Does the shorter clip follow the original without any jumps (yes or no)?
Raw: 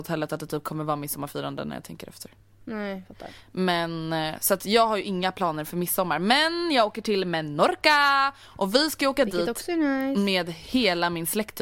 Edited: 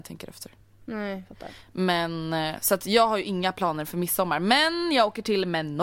yes